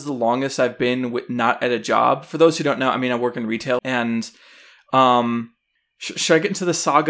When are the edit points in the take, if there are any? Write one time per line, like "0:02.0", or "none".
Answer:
0:03.8